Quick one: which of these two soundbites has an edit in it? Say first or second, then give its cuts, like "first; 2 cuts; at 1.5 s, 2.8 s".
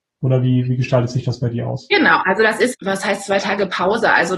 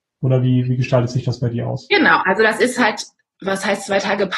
first; 1 cut; at 2.7 s